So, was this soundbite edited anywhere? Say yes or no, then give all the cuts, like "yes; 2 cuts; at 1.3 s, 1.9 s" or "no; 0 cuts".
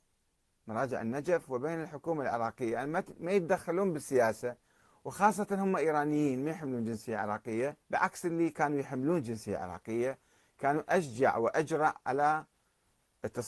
yes; 1 cut; at 7.8 s